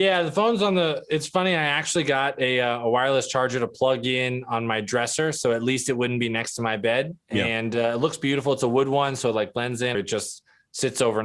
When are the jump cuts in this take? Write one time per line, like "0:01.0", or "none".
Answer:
0:07.2
0:09.9